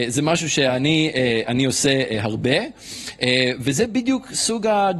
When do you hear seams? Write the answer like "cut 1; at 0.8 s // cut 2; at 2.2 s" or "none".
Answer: none